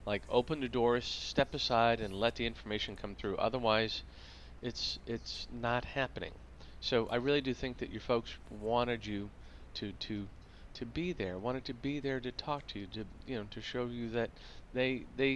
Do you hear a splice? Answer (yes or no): no